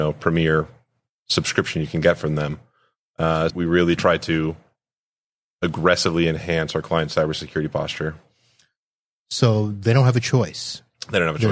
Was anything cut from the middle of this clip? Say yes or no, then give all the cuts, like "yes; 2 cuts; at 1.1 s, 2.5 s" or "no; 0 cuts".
yes; 1 cut; at 3.5 s